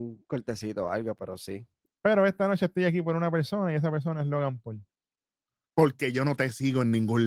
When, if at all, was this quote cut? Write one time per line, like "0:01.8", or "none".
0:01.9
0:05.7